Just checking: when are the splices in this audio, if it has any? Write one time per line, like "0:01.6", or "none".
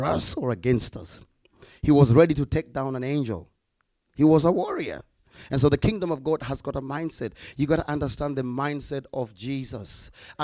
none